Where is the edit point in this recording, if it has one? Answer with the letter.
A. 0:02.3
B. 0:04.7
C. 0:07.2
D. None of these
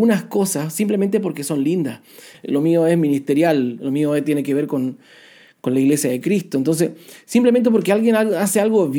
A